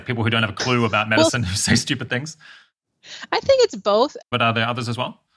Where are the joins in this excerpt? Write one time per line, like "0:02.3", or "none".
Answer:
0:04.2

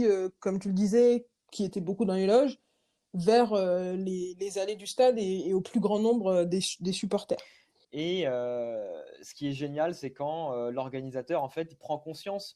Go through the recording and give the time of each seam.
0:07.8

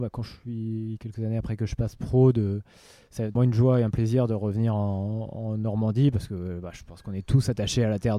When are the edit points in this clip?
0:03.4

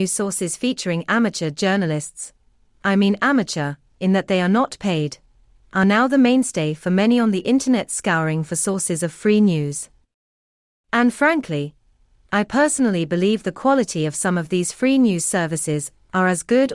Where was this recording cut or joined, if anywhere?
none

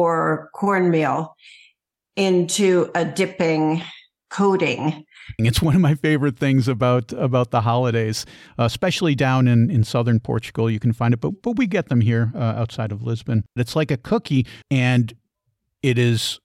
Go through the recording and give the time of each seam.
0:05.4
0:13.6
0:14.6

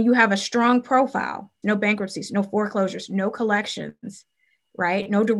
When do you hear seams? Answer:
0:01.6

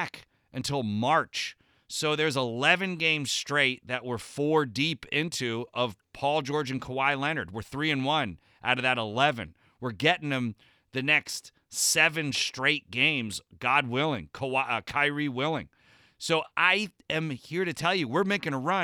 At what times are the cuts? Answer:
none

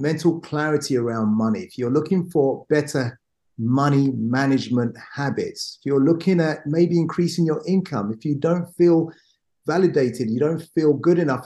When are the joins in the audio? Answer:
none

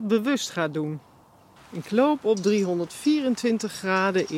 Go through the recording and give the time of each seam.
0:01.6

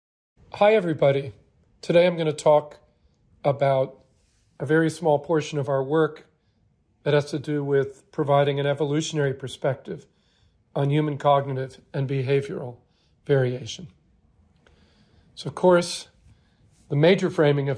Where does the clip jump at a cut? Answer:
0:01.7

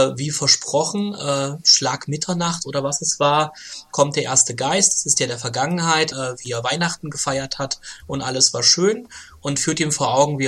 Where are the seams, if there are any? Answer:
0:06.1

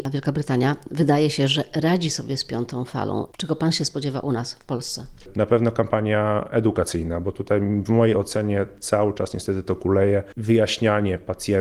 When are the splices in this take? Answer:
0:05.3

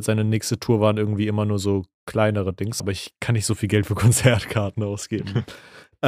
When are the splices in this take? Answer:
0:02.8

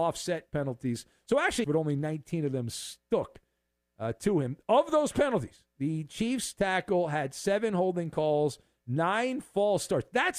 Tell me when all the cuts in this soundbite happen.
0:01.6

